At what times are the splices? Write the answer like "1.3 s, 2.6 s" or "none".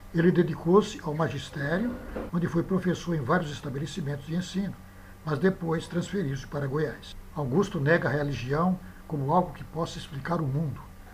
2.3 s, 7.3 s